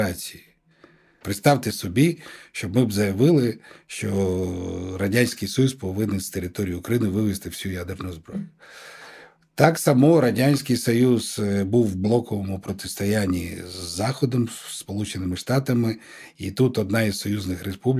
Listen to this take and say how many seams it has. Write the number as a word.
one